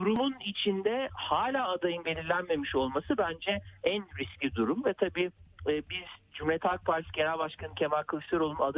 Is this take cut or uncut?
uncut